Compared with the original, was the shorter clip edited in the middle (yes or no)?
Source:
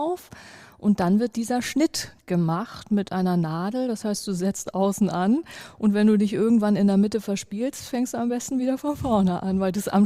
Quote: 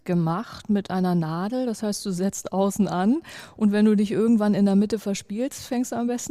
no